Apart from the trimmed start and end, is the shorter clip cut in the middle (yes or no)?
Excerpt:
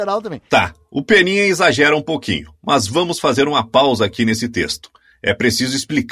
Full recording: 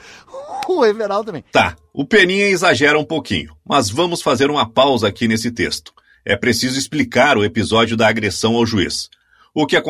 no